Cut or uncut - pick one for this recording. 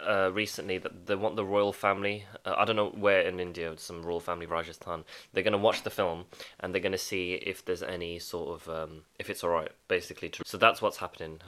cut